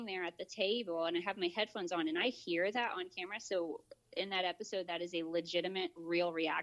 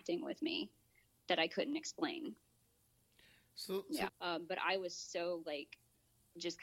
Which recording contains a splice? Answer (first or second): second